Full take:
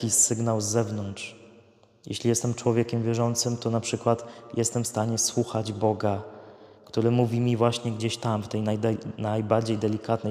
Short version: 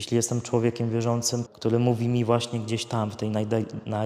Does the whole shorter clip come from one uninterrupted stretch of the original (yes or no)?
no